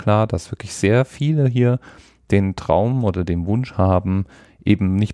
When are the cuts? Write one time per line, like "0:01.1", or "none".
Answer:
none